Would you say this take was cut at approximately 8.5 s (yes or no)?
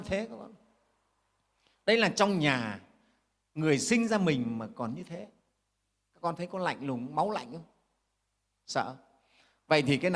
no